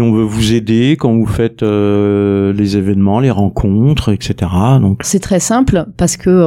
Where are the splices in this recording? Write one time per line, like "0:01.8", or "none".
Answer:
0:05.0